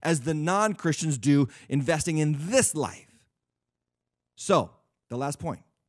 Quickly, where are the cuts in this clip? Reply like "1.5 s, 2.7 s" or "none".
none